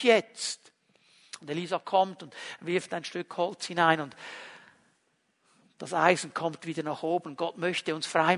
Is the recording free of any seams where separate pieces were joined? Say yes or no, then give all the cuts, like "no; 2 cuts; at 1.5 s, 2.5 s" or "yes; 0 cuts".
yes; 0 cuts